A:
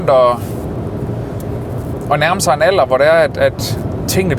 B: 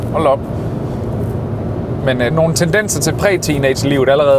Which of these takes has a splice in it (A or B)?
B